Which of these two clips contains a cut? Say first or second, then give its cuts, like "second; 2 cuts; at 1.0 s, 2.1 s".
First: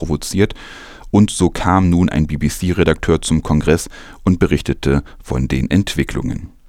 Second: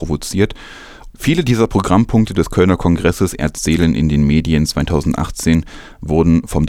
second; 1 cut; at 1.1 s